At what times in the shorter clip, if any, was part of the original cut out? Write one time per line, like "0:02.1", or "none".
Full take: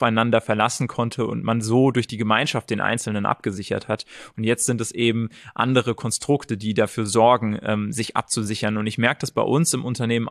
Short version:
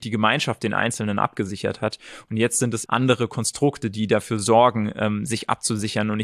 0:02.9